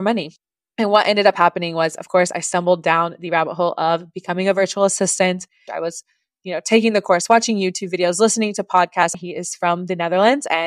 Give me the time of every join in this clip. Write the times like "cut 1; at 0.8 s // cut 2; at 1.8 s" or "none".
cut 1; at 5.7 s // cut 2; at 9.1 s